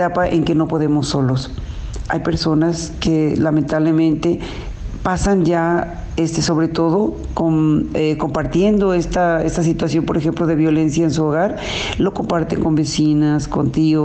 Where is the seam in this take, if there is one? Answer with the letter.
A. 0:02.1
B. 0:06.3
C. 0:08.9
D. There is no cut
A